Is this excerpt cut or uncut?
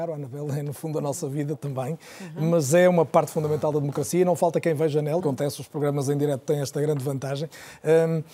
cut